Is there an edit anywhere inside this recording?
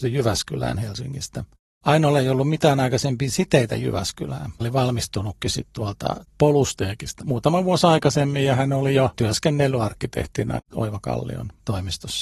yes; 2 cuts; at 4.6 s, 7.2 s

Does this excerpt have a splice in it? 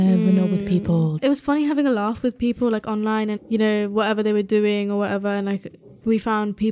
yes; 1 cut; at 3.4 s

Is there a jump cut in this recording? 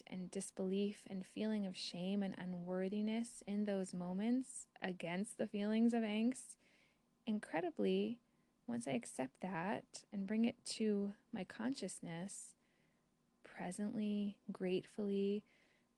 yes; 1 cut; at 13.3 s

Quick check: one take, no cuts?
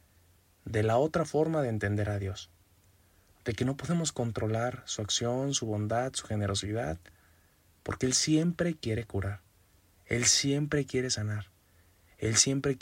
yes; 0 cuts

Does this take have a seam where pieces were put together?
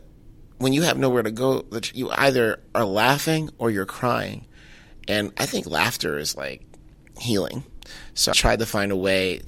yes; 1 cut; at 8.3 s

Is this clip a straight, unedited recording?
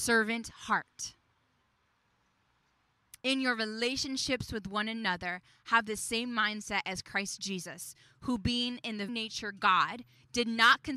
no; 2 cuts; at 3.2 s, 9.1 s

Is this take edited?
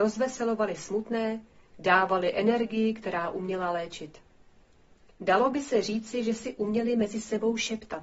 yes; 1 cut; at 5.1 s

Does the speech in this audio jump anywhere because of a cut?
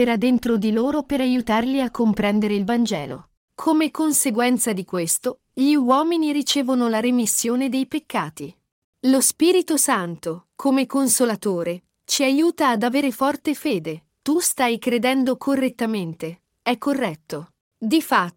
yes; 3 cuts; at 8.8 s, 14.1 s, 16.5 s

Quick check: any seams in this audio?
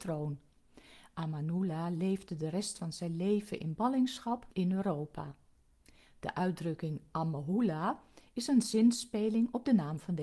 no; 0 cuts

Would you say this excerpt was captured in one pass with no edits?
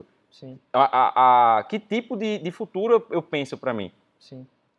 yes; 0 cuts

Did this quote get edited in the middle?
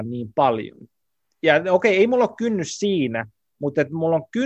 no; 0 cuts

